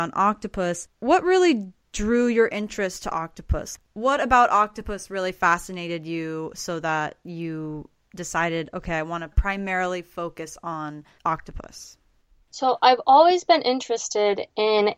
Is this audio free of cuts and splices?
yes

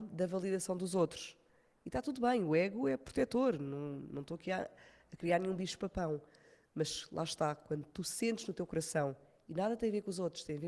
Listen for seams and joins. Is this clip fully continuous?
yes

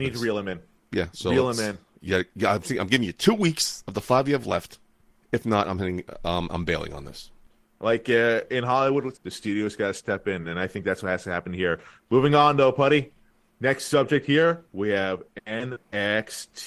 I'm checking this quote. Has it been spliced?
yes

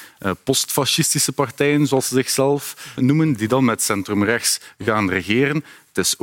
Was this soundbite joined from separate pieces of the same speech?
yes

